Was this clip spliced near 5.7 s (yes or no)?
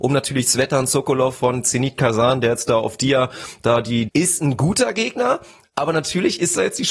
no